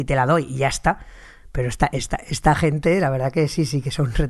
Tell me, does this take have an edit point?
no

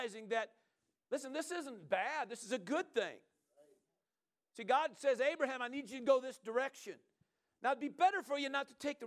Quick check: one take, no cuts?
yes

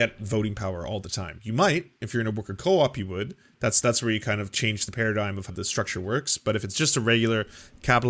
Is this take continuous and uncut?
no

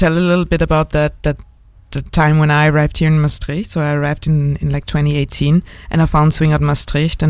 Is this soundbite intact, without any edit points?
yes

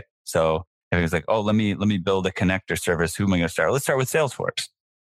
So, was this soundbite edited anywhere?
no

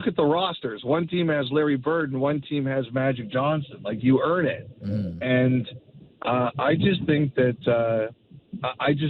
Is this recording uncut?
yes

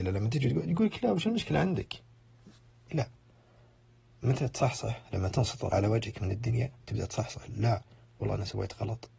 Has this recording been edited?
yes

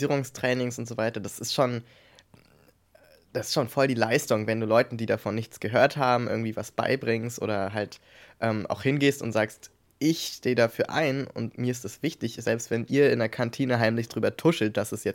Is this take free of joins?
yes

